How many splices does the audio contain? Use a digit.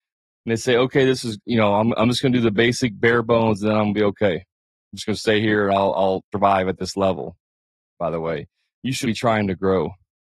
3